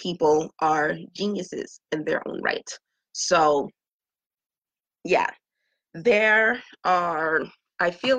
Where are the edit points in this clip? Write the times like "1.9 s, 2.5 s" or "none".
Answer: none